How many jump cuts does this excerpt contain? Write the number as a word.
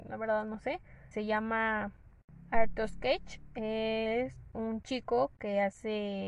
one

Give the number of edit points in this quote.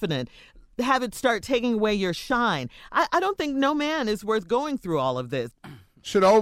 one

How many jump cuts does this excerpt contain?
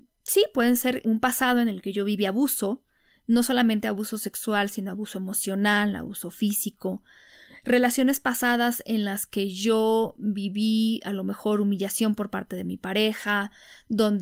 one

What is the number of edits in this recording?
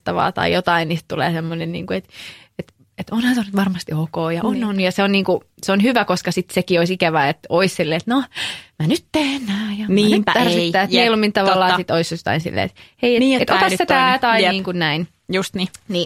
zero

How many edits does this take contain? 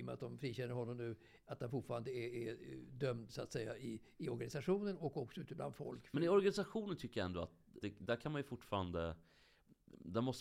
one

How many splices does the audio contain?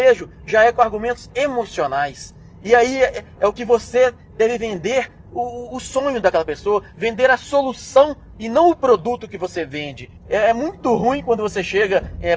one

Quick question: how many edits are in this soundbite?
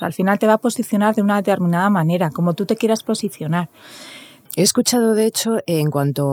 one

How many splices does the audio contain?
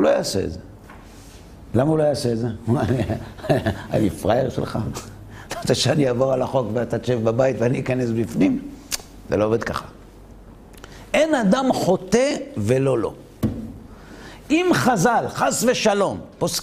zero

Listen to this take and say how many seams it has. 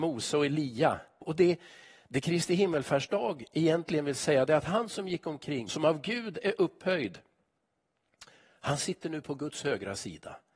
two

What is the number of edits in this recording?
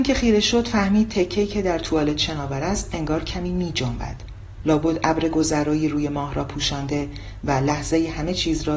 one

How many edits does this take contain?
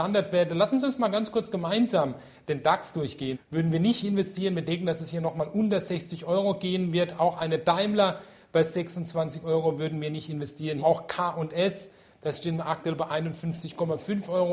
two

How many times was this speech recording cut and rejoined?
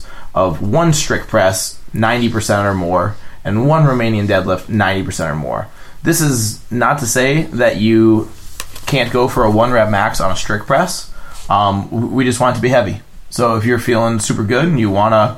zero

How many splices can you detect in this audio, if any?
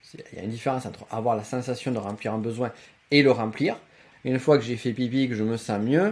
one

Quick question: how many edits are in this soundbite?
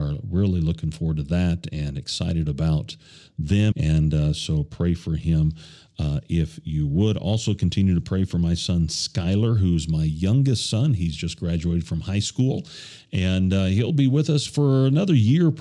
one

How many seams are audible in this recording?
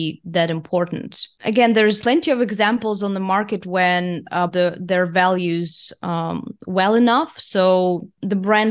two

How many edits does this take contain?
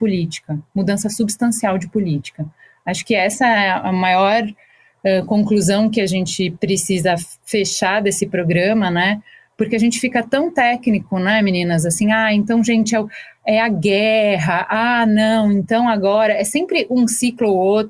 zero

